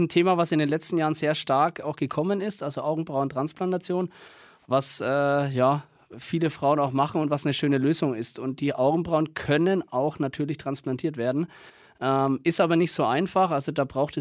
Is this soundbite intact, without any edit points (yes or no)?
yes